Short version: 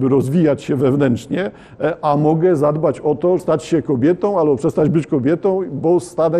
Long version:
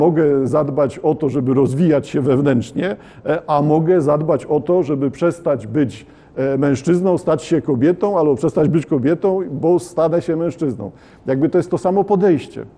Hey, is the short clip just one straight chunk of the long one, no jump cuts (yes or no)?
no